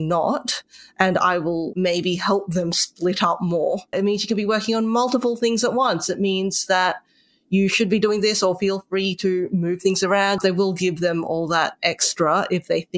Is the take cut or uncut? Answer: cut